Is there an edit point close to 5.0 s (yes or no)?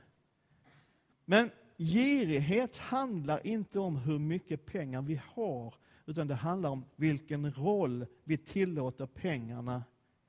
no